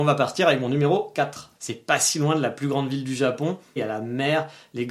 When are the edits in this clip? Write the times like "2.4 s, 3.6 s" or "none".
1.5 s, 3.8 s